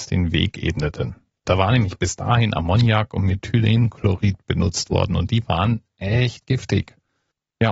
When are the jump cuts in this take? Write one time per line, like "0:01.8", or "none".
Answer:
0:01.5